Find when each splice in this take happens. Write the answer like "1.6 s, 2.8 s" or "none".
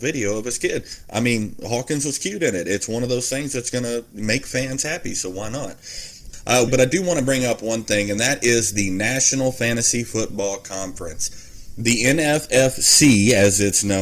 6.7 s